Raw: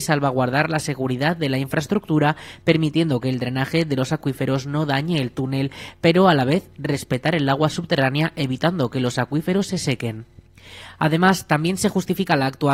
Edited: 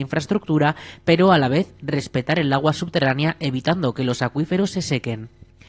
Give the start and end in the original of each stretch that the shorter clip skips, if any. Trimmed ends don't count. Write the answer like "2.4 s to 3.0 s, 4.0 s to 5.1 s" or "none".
2.6 s to 5.9 s

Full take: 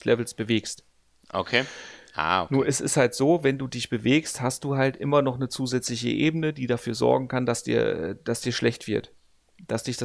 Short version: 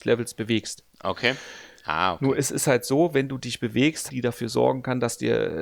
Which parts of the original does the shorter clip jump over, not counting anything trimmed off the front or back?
0.9 s to 1.2 s, 4.4 s to 6.5 s

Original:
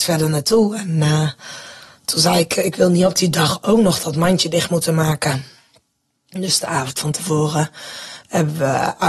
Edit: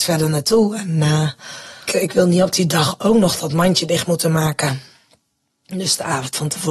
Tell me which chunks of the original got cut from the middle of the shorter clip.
1.9 s to 2.5 s

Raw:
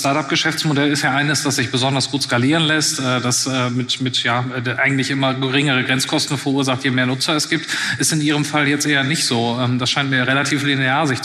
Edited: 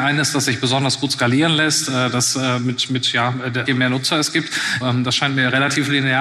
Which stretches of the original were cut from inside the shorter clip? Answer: 4.8 s to 6.8 s, 8.0 s to 9.6 s

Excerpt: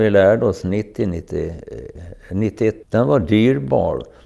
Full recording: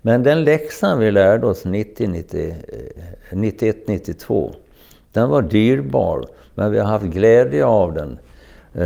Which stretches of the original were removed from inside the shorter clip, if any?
3.8 s to 5.0 s

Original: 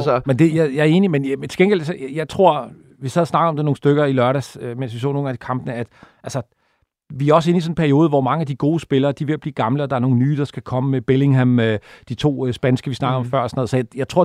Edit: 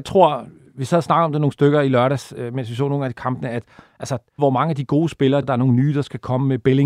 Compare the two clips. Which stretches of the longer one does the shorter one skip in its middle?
6.6 s to 8.1 s, 9.1 s to 9.9 s

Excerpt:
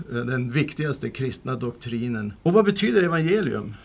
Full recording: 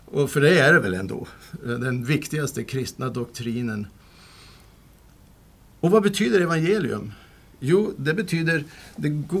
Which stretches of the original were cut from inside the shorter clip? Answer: 3.9 s to 5.8 s

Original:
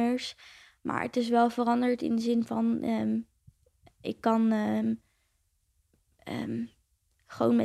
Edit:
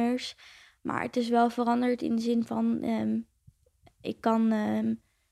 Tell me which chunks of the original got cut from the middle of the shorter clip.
none

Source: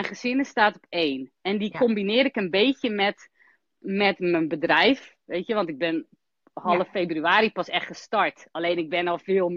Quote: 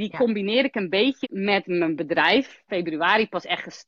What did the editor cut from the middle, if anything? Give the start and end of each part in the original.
2.8 s to 3.8 s, 5.2 s to 6.9 s

